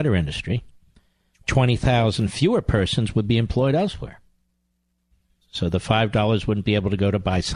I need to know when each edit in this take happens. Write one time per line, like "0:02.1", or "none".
0:05.4